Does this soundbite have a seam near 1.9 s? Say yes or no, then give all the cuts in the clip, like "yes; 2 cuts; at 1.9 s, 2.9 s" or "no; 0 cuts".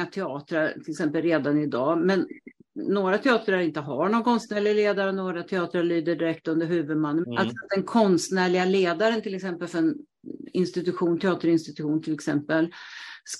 no; 1 cut; at 7.2 s